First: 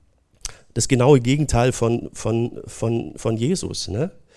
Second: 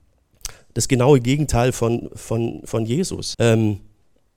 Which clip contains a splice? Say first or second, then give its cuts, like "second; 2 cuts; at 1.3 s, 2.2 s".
second; 2 cuts; at 2.1 s, 3.3 s